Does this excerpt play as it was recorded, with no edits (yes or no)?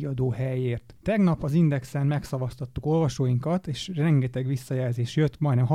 yes